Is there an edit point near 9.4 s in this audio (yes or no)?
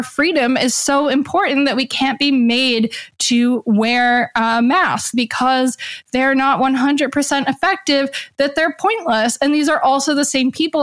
no